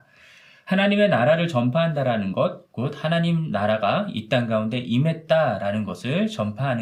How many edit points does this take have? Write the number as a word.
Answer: one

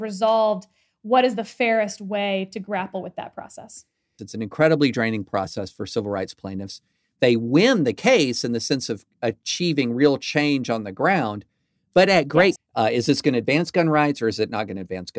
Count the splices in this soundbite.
two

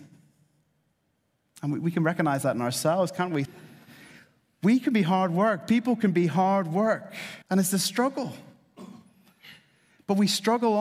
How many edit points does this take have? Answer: two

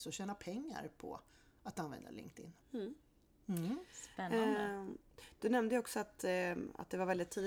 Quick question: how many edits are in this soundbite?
one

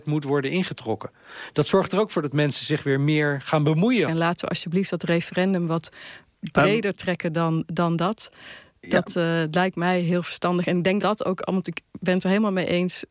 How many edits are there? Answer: two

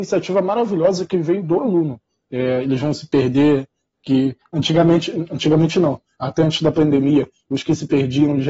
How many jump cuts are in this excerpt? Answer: one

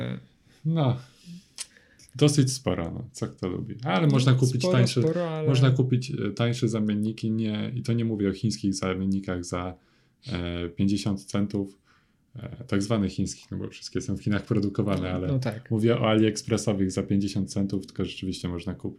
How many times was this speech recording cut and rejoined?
zero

